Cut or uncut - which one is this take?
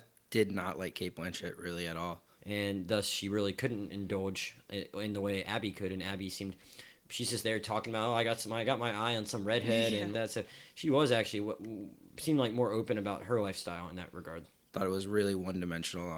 cut